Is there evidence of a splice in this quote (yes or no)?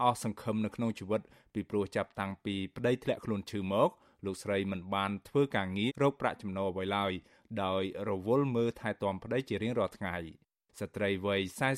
yes